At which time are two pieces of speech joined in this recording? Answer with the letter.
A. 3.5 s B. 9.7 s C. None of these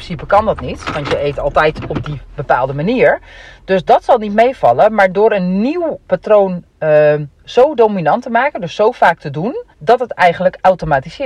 B